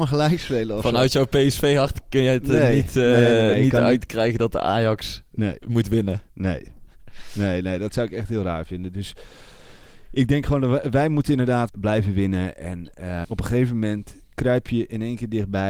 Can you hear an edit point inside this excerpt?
yes; 2 cuts; at 11.7 s, 13.2 s

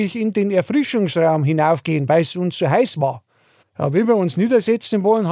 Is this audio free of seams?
no; 1 cut; at 3.6 s

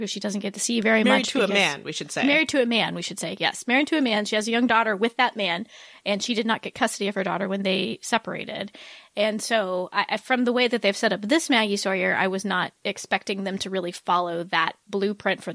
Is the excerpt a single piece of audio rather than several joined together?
yes; 0 cuts

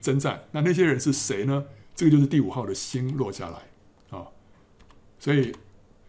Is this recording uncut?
no; 1 cut; at 1.8 s

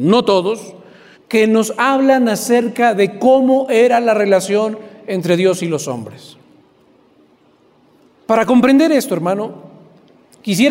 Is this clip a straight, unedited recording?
no; 2 cuts; at 1.1 s, 8.1 s

